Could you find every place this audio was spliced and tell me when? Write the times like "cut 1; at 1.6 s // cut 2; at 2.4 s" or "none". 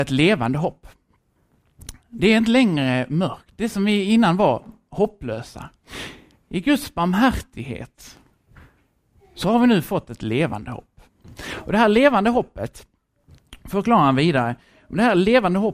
none